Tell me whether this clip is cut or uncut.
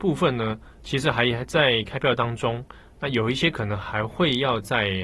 uncut